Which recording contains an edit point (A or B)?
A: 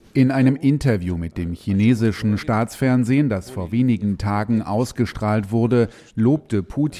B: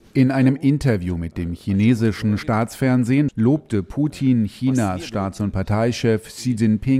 B